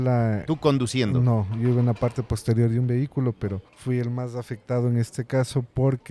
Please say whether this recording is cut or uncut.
cut